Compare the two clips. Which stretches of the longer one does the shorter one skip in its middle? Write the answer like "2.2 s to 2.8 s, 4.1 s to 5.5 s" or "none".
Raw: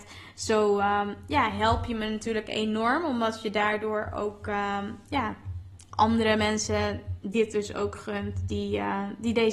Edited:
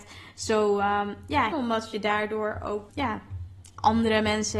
1.5 s to 3.0 s, 4.4 s to 5.0 s